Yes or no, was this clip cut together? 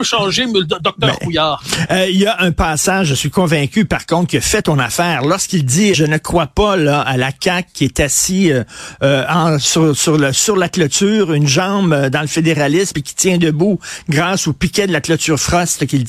yes